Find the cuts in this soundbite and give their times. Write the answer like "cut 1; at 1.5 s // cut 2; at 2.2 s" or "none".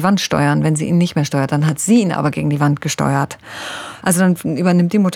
cut 1; at 4.0 s